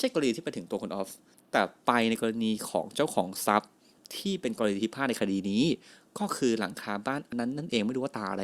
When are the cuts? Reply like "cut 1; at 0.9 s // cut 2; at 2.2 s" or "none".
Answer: cut 1; at 7.3 s